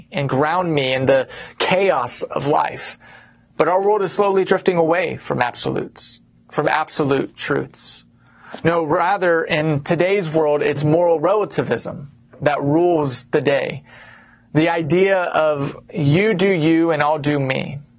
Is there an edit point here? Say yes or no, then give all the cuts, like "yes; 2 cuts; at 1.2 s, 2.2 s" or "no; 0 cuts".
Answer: no; 0 cuts